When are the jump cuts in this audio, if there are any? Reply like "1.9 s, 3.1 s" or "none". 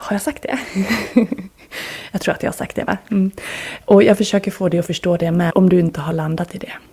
5.5 s